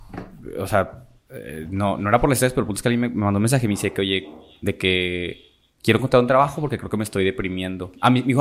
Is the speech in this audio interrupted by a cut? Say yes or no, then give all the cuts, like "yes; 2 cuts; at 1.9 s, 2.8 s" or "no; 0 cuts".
no; 0 cuts